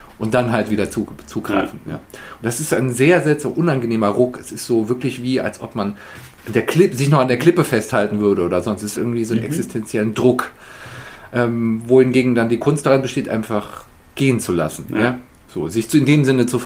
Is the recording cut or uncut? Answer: cut